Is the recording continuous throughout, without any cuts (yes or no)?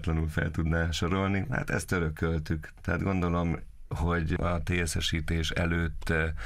yes